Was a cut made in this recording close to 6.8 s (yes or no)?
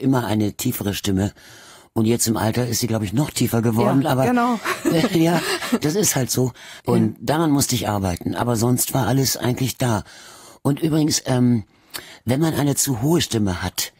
yes